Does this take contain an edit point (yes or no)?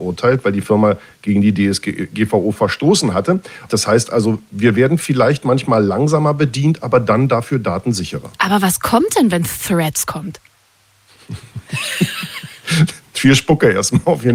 yes